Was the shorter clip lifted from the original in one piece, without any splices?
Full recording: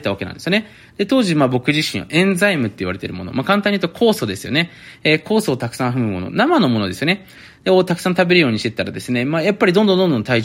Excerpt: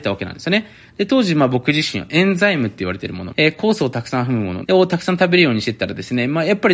no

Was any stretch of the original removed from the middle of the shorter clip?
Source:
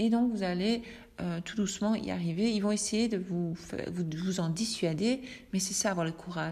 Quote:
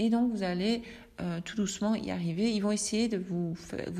no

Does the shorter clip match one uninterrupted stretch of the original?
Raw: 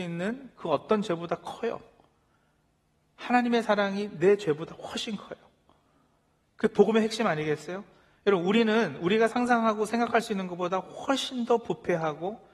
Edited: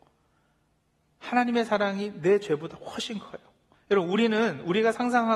no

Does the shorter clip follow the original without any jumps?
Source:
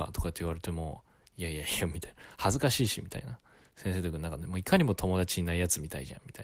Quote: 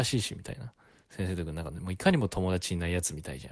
yes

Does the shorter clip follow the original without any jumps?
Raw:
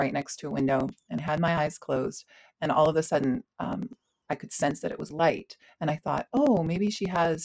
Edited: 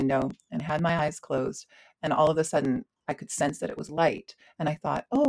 no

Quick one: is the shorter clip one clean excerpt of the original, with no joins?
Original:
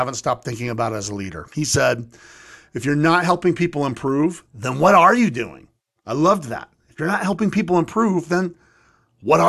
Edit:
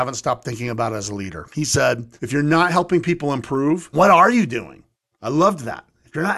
no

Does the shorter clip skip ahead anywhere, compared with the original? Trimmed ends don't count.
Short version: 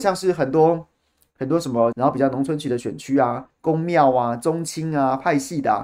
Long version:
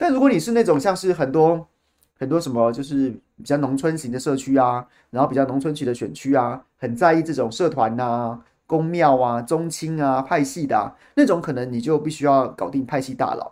yes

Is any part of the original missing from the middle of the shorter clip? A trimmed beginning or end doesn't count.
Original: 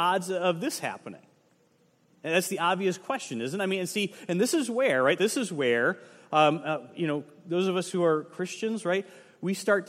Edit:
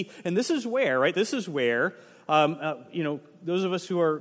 no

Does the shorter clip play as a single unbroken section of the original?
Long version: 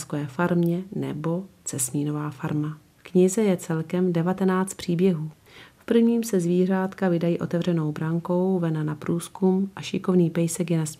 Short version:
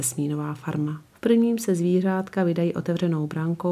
no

